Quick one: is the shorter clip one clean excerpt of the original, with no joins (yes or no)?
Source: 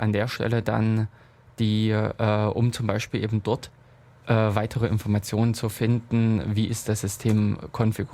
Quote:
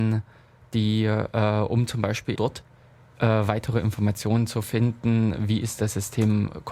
no